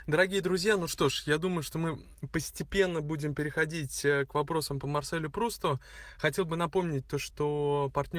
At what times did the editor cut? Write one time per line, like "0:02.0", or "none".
none

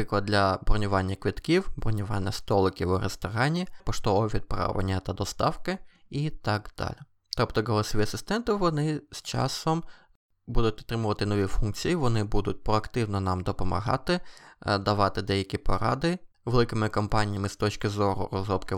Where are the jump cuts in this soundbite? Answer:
0:03.8
0:16.3

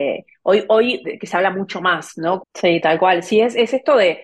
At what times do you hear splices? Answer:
0:01.0
0:02.4

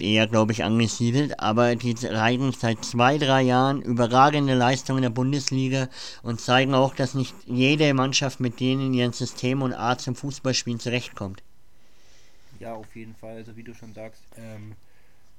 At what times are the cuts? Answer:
0:14.3

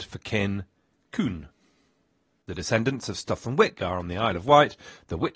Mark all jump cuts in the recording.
0:02.4

